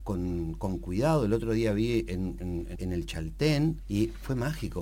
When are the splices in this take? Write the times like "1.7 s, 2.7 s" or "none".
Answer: 2.7 s, 3.8 s